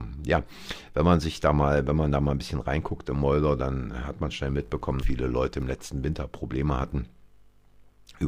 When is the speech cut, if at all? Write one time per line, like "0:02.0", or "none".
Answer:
0:05.0